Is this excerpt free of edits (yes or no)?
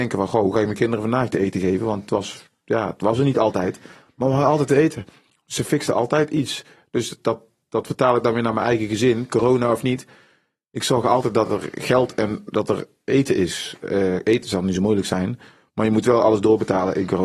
yes